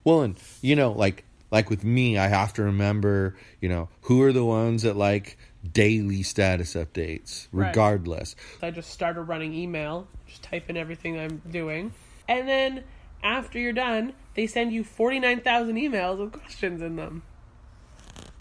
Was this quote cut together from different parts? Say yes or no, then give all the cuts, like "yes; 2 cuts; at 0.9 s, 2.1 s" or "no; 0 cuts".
yes; 2 cuts; at 8.6 s, 12.2 s